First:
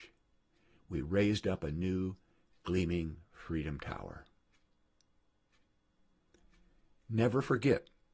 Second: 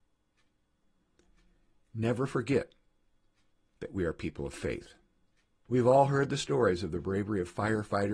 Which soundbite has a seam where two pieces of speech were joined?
second; 1 cut; at 5.7 s

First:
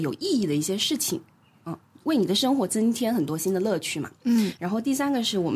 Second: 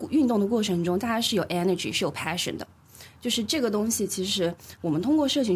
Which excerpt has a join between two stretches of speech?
first; 1 cut; at 4.6 s

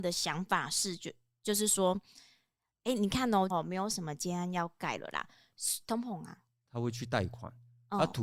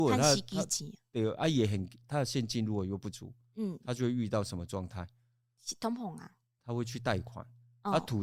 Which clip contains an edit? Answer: first; 2 cuts; at 3.5 s, 5.8 s

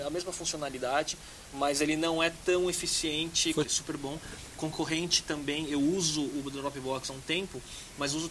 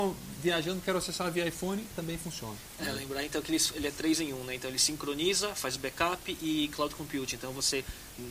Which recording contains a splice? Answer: first; 1 cut; at 3.6 s

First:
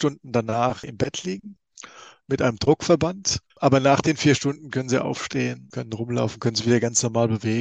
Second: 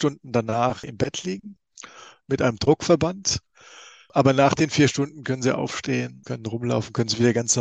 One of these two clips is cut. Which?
first; 1 cut; at 3.5 s

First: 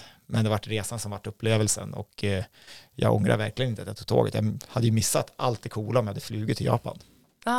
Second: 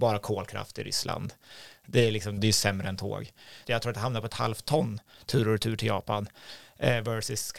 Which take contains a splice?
second; 2 cuts; at 2.4 s, 3.6 s

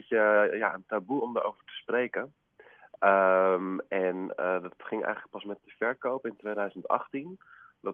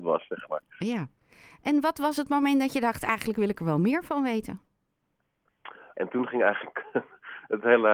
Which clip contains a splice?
second; 1 cut; at 5.9 s

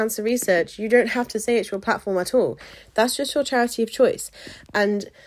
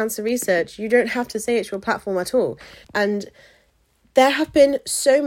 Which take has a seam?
second; 1 cut; at 2.8 s

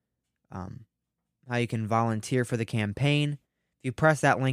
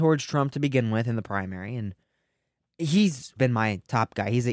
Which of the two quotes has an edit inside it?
second; 1 cut; at 3.4 s

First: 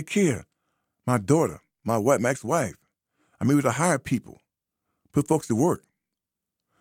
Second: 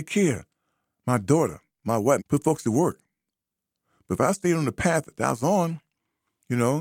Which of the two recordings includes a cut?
second; 1 cut; at 2.2 s

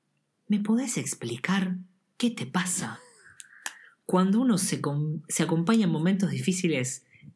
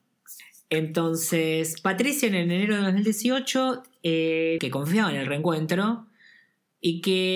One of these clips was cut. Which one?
second; 1 cut; at 4.6 s

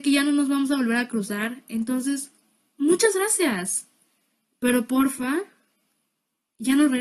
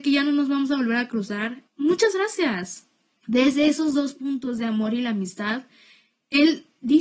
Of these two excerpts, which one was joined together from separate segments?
second; 2 cuts; at 1.7 s, 3.2 s

